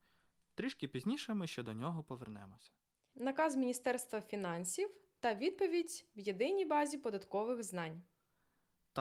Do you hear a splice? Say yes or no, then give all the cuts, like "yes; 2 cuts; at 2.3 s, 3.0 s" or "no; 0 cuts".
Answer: yes; 1 cut; at 3.1 s